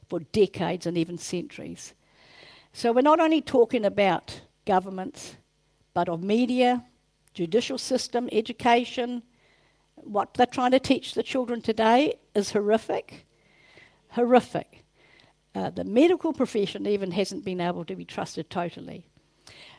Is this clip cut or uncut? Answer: uncut